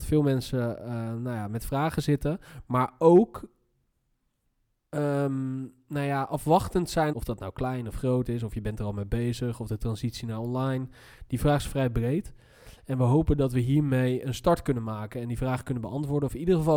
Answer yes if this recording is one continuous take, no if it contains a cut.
no